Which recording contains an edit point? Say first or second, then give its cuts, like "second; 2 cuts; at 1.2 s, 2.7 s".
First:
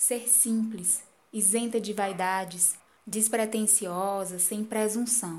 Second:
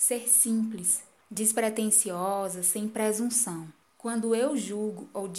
second; 2 cuts; at 1.2 s, 3.8 s